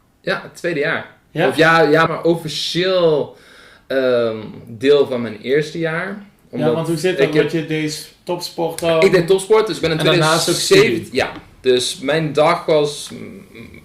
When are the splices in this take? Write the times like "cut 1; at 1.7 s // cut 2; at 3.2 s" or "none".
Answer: cut 1; at 2.1 s